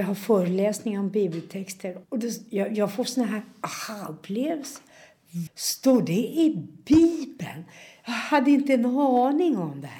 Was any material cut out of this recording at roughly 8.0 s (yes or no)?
no